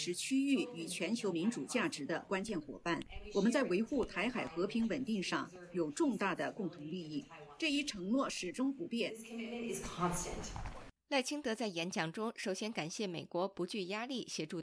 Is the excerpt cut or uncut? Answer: uncut